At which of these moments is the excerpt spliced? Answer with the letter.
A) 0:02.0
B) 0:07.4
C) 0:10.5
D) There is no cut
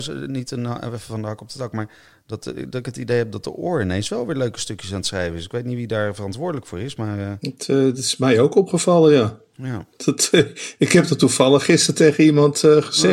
D